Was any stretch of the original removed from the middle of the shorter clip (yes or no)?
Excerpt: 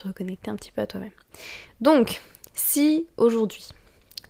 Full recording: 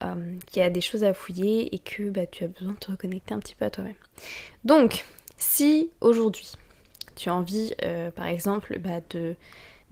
no